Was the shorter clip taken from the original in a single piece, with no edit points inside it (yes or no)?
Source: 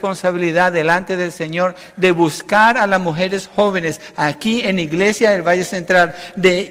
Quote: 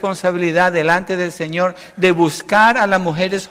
yes